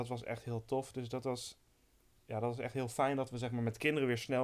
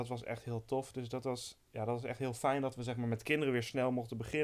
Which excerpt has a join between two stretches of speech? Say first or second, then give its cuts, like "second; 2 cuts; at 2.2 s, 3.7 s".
second; 1 cut; at 1.7 s